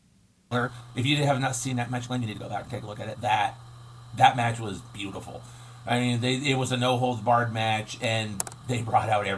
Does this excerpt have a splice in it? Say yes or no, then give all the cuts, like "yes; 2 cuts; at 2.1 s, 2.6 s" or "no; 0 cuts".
no; 0 cuts